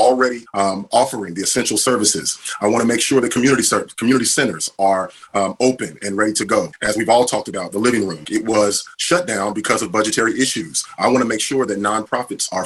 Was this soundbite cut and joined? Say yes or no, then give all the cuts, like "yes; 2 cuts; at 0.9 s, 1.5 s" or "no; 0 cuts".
yes; 2 cuts; at 8.2 s, 11.0 s